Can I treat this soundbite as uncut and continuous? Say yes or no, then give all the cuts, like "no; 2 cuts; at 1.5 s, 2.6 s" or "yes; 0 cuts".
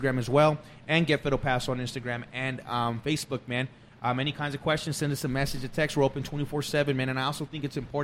yes; 0 cuts